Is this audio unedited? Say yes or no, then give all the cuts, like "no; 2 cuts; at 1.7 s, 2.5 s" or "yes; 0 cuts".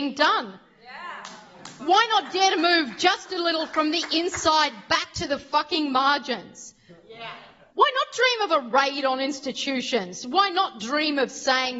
no; 1 cut; at 7.7 s